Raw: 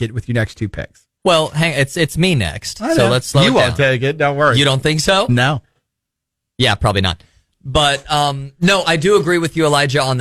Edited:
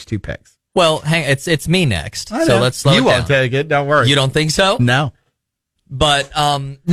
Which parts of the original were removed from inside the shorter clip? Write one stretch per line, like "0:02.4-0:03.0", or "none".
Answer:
0:06.3-0:07.5